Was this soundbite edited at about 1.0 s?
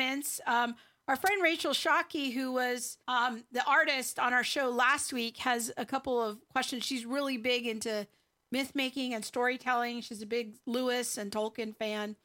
no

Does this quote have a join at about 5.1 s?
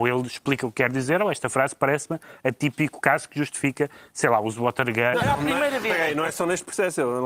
yes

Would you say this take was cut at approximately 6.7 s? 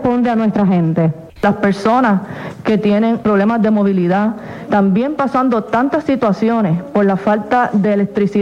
no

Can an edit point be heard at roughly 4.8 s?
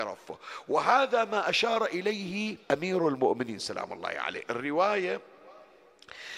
no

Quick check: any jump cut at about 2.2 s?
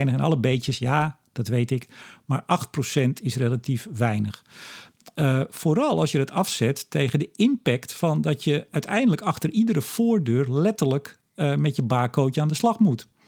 no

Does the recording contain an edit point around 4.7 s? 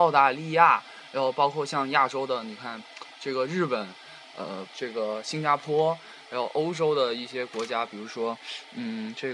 yes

